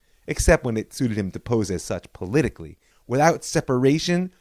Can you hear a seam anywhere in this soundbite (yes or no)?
yes